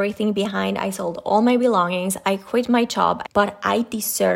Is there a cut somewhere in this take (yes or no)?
yes